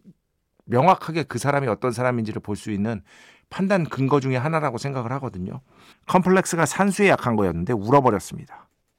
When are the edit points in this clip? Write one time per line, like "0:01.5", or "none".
0:05.9

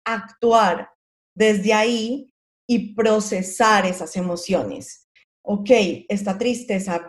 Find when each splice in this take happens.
0:05.3

